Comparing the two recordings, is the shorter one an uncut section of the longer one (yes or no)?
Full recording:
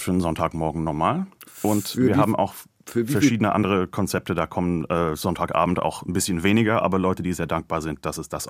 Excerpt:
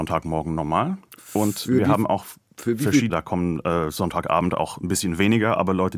no